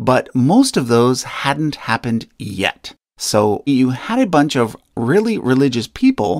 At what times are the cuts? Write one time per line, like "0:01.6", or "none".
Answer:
0:03.7